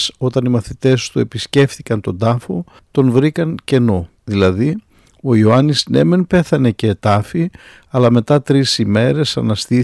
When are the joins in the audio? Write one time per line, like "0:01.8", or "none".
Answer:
0:04.2